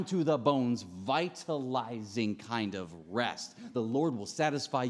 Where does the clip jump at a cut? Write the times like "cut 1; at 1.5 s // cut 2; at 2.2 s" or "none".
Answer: none